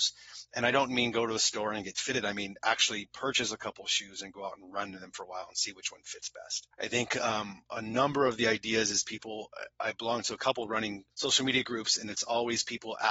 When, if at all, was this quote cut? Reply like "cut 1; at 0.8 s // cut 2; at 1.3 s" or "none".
cut 1; at 6.7 s